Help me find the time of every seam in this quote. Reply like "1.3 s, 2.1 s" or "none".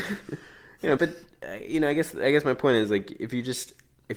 1.0 s